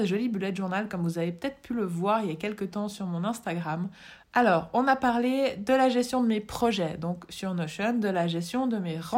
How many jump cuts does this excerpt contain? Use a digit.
1